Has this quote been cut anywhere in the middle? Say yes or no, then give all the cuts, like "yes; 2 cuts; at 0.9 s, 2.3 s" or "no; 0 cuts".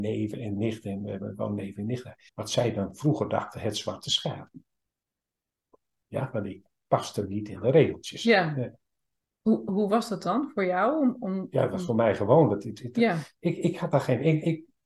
yes; 1 cut; at 2.3 s